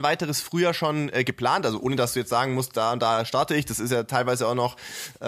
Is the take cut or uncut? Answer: uncut